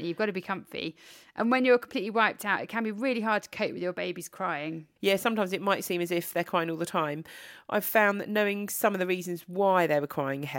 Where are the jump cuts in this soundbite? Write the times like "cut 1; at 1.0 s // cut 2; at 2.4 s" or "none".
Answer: none